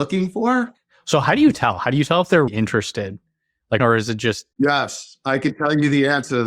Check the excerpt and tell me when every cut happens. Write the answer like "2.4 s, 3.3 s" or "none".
2.5 s, 3.8 s